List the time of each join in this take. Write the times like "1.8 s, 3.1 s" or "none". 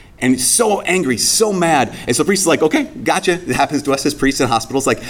none